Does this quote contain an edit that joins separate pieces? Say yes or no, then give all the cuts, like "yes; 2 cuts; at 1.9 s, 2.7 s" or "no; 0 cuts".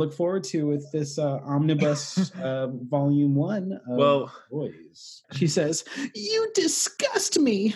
yes; 1 cut; at 5.2 s